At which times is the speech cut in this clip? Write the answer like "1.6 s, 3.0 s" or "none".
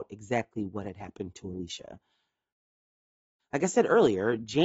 3.4 s